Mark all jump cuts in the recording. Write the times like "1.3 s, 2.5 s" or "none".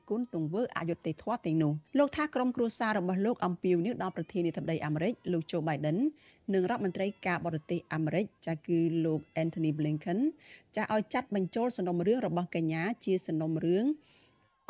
1.9 s